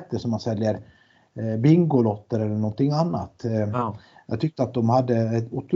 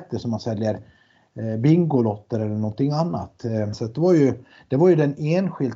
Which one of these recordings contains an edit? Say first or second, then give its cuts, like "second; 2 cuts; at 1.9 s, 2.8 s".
second; 1 cut; at 3.7 s